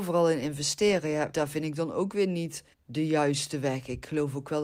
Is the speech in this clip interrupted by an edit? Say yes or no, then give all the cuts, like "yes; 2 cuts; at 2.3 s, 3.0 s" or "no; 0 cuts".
yes; 2 cuts; at 1.3 s, 2.7 s